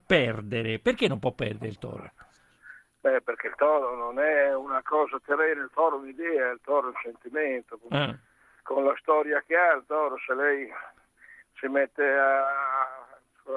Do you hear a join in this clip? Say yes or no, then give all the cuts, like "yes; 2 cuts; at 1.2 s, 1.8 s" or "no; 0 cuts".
no; 0 cuts